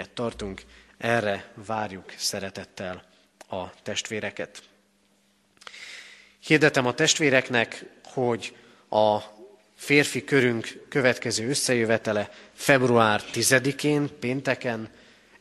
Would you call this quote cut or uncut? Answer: uncut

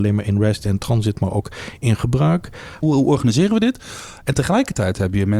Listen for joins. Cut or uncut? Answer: cut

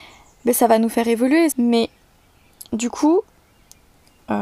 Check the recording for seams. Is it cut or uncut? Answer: cut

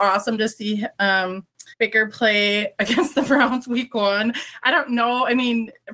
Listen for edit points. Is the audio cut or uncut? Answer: cut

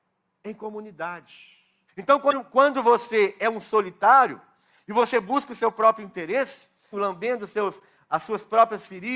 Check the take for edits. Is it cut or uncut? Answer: cut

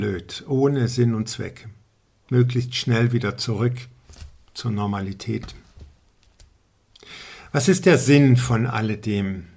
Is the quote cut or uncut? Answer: uncut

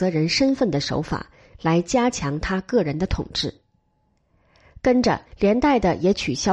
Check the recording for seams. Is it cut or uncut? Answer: cut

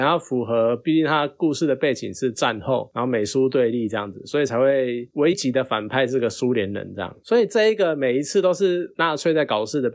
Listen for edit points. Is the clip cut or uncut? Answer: cut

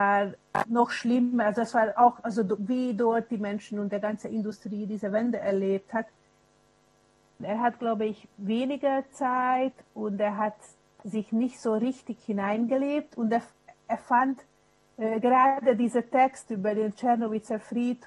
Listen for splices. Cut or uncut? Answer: cut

